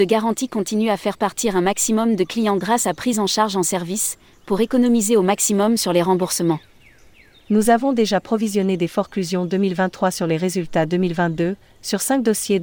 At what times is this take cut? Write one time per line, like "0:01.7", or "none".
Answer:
none